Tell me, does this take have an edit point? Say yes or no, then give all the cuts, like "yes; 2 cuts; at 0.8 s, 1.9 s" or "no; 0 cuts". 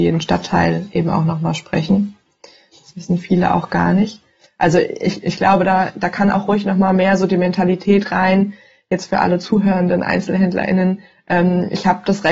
no; 0 cuts